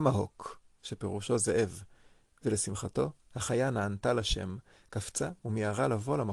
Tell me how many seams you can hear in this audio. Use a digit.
0